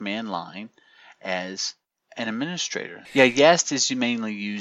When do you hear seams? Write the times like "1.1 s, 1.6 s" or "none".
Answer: 3.1 s